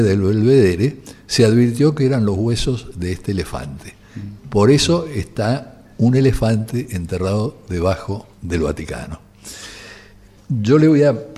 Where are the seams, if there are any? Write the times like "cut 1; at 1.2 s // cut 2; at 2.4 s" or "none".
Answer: cut 1; at 4.4 s // cut 2; at 8.3 s